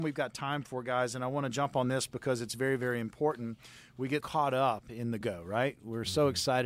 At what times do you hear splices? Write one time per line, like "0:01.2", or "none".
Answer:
0:04.2
0:05.2